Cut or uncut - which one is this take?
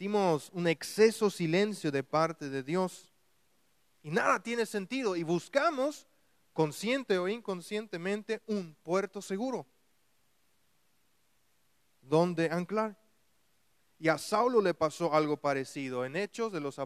uncut